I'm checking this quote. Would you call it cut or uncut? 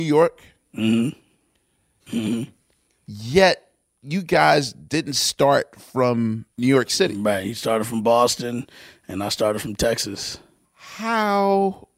cut